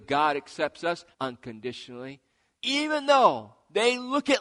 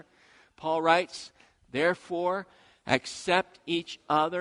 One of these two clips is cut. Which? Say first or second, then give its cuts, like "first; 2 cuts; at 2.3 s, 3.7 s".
first; 2 cuts; at 1.1 s, 2.5 s